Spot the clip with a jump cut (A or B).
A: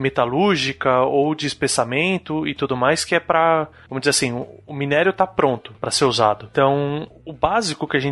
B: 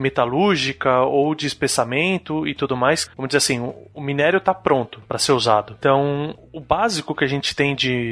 B